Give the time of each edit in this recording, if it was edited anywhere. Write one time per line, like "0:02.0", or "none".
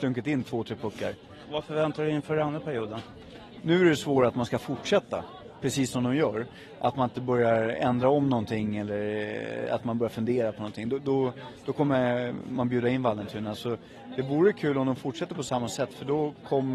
none

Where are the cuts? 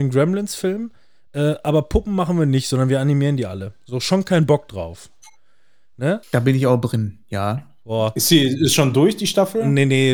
0:06.2

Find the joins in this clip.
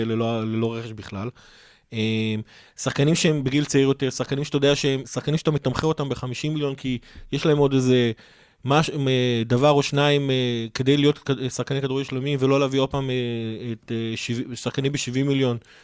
0:05.0

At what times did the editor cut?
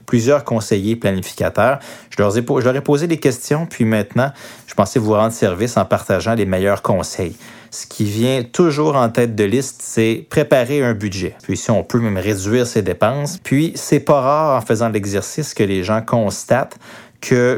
0:11.4
0:13.4

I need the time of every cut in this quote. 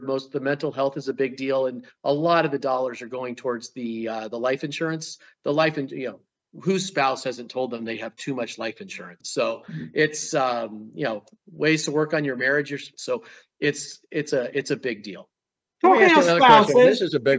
0:09.2
0:13.0

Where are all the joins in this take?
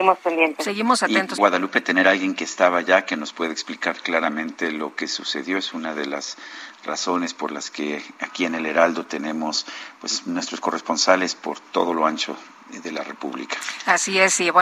0:01.4

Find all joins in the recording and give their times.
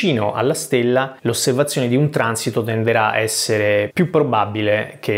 0:01.2
0:03.9

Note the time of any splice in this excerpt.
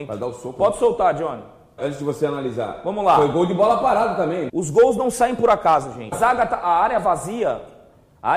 0:01.8
0:04.5
0:06.1

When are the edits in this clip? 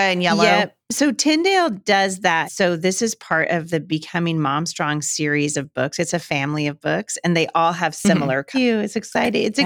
0:02.4
0:08.5

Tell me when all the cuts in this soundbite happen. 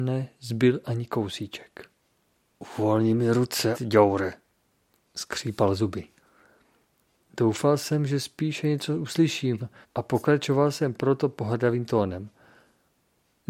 0:03.7
0:09.8

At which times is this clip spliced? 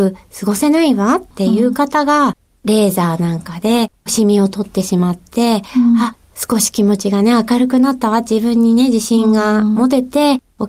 0:01.3

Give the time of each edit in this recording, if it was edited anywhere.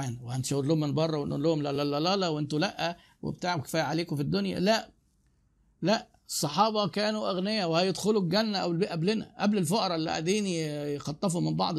none

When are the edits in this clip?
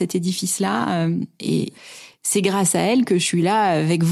none

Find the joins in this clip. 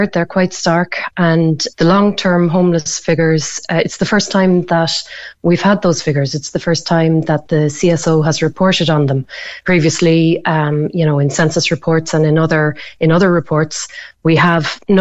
0:01.7

